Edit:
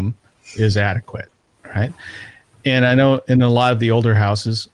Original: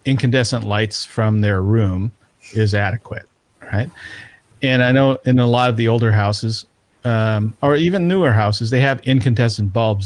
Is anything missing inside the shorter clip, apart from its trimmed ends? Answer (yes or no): no